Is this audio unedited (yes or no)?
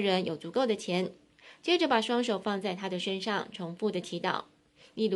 yes